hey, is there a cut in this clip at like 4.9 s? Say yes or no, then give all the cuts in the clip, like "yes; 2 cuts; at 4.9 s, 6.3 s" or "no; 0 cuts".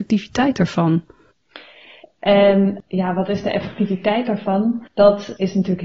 no; 1 cut; at 2.0 s